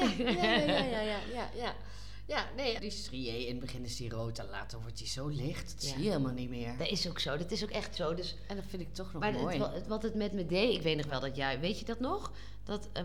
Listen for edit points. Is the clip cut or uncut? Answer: cut